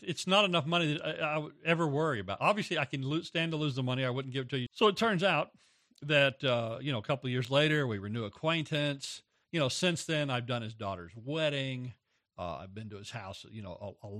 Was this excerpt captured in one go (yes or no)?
no